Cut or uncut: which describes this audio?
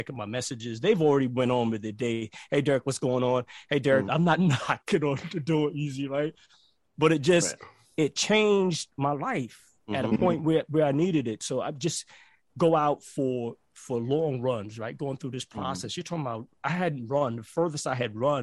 cut